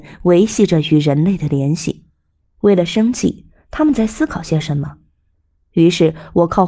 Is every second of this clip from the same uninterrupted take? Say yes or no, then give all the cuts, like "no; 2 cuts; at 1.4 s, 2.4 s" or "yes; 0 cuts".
no; 2 cuts; at 2.4 s, 5.6 s